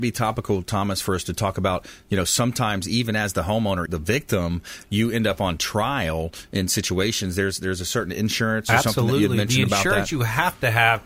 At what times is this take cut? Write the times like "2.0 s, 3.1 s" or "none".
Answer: 3.9 s